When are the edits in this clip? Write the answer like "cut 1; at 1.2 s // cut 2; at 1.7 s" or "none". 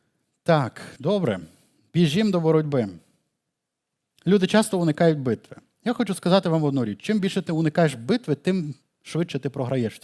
none